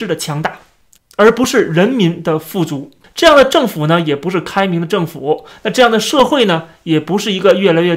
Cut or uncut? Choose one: cut